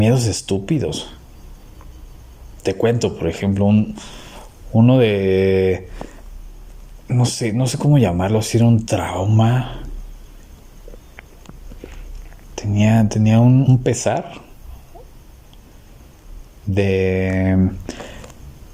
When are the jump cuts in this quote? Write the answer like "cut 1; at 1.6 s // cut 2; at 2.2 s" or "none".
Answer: cut 1; at 13.6 s